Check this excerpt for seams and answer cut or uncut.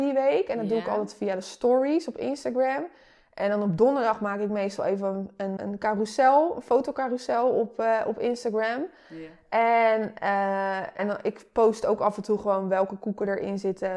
cut